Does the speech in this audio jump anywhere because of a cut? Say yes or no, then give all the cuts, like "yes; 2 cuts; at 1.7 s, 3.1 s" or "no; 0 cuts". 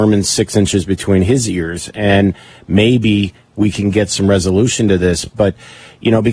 no; 0 cuts